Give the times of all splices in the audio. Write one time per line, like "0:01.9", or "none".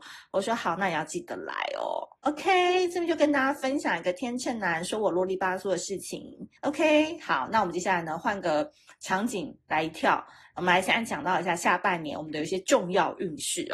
0:06.6